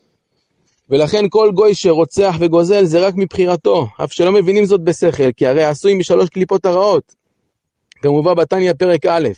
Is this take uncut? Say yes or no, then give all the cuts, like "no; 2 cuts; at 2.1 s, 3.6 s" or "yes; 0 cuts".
yes; 0 cuts